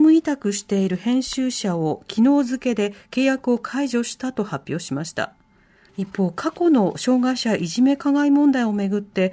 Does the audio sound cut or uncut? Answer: cut